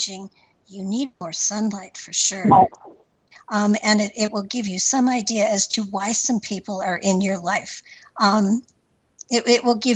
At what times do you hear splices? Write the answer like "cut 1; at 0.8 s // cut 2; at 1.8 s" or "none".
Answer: cut 1; at 3.3 s